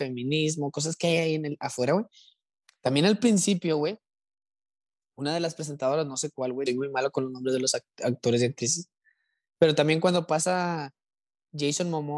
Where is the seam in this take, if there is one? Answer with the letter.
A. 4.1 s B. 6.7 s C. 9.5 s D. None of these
B